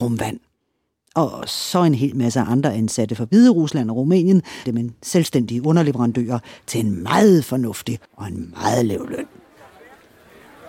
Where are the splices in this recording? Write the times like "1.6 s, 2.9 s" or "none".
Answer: 4.7 s, 8.1 s